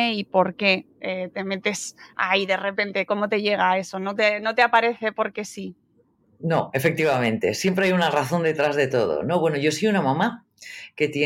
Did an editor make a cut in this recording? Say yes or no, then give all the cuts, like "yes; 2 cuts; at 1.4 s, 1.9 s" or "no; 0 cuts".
no; 0 cuts